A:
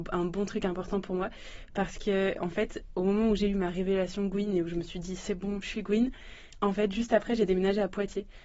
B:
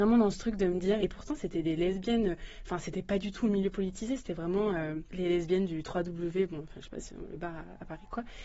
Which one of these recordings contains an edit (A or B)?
B